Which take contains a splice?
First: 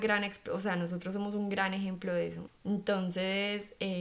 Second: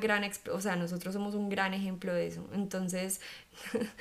first; 1 cut; at 2.5 s

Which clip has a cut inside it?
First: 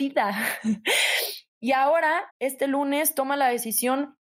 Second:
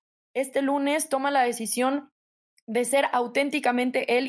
first; 1 cut; at 2.3 s

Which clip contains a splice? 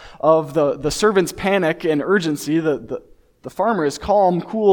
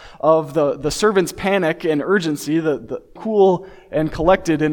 second; 1 cut; at 3.2 s

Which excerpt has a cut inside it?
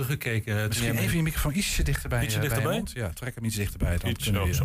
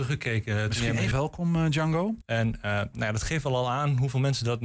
second; 2 cuts; at 1.1 s, 2.2 s

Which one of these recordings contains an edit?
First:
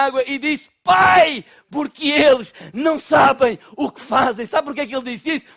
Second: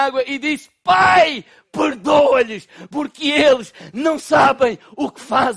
first; 1 cut; at 1.7 s

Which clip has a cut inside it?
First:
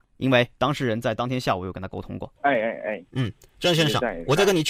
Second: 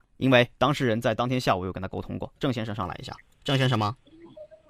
first; 1 cut; at 2.4 s

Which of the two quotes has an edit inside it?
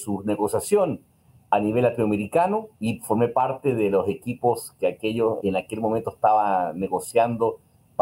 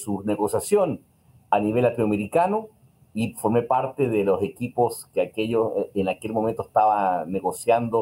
first; 2 cuts; at 2.7 s, 5.4 s

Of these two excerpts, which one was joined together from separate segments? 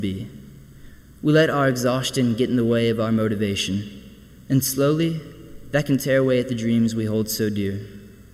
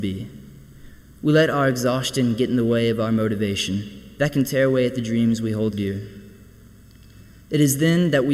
second; 2 cuts; at 4.2 s, 5.7 s

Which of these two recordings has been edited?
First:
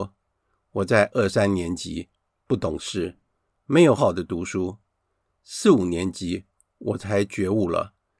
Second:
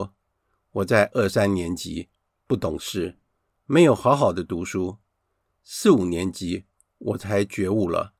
first; 1 cut; at 4.0 s

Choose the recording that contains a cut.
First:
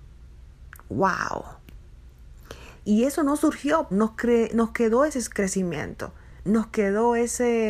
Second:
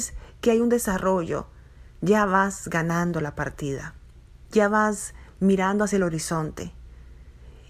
first; 2 cuts; at 2.8 s, 3.9 s

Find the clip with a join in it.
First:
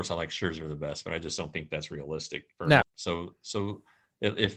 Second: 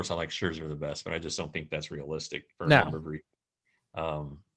first; 1 cut; at 2.8 s

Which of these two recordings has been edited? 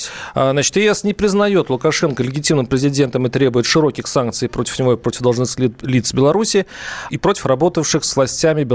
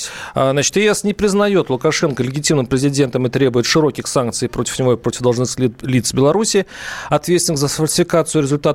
first; 1 cut; at 7.1 s

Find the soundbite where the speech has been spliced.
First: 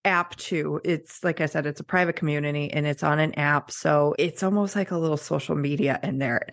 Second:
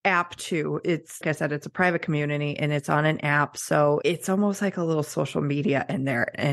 second; 1 cut; at 1.2 s

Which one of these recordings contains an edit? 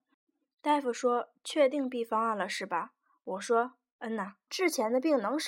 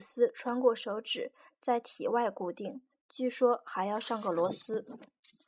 first; 1 cut; at 4.5 s

